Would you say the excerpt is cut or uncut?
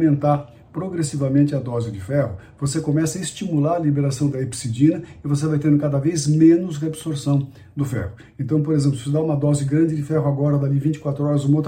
uncut